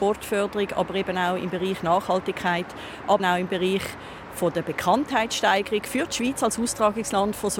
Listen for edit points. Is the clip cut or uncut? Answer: cut